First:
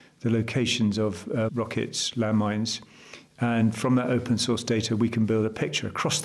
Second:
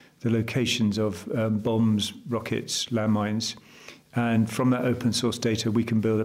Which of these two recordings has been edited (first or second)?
first